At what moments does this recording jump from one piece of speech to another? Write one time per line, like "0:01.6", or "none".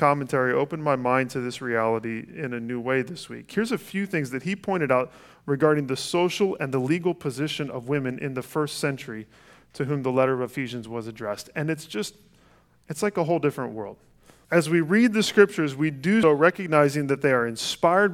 0:14.4
0:16.2